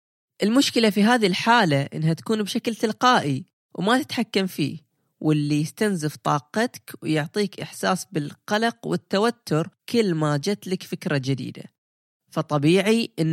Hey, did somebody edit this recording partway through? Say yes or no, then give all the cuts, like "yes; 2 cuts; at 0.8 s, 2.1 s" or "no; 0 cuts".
yes; 1 cut; at 9.8 s